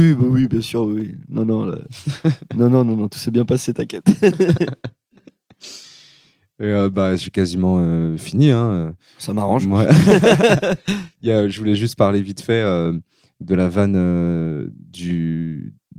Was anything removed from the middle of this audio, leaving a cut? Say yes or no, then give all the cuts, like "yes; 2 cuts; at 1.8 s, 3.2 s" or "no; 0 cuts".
no; 0 cuts